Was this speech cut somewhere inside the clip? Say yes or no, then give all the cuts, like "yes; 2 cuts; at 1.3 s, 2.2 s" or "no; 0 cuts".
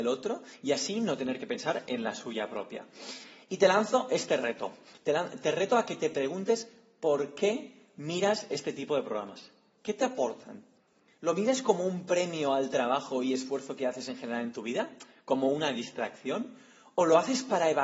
no; 0 cuts